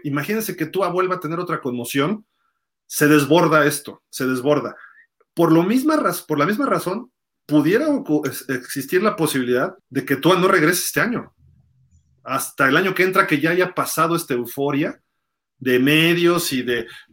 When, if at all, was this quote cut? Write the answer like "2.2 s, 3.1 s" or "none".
9.8 s